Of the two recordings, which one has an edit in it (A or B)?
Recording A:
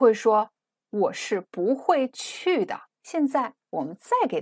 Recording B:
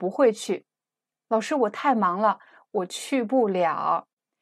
A